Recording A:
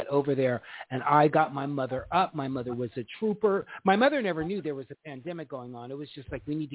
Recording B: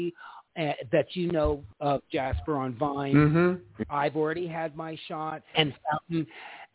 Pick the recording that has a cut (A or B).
B